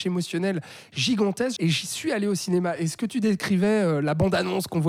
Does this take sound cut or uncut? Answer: cut